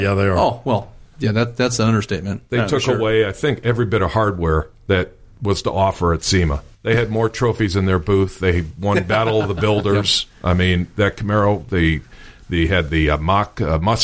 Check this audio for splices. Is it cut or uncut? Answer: uncut